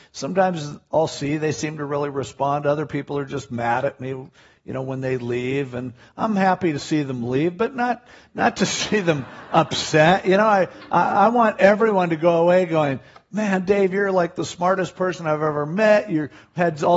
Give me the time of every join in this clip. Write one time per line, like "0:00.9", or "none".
none